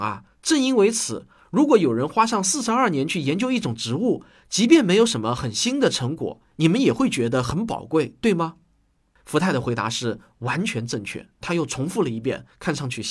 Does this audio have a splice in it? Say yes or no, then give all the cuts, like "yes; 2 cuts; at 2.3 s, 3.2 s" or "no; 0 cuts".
yes; 1 cut; at 11.4 s